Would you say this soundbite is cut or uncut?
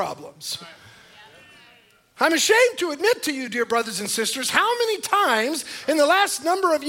uncut